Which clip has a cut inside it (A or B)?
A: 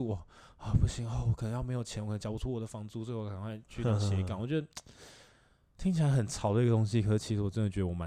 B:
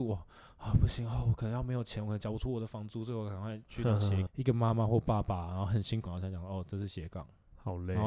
B